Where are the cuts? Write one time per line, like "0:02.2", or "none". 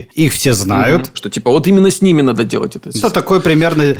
0:01.1
0:03.0

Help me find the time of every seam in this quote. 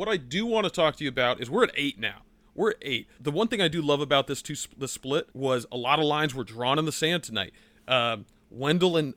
0:03.2
0:05.3

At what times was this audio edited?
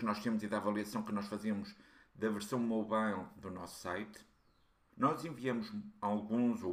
0:04.9

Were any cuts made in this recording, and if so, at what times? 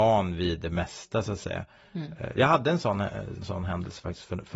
0:03.4

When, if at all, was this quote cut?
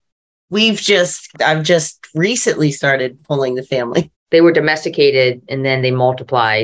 0:01.3
0:04.1

